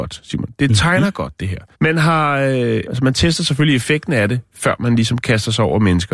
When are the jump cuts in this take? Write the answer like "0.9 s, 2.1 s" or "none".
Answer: 1.7 s, 2.8 s, 4.5 s